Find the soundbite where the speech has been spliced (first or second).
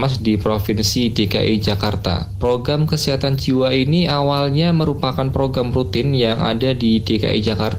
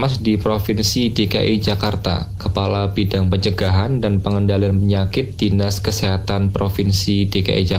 second